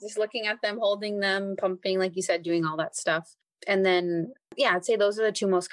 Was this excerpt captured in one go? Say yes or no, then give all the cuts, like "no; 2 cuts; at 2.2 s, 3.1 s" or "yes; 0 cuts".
yes; 0 cuts